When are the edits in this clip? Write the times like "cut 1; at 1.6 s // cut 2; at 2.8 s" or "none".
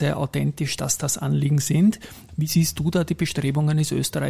cut 1; at 2.3 s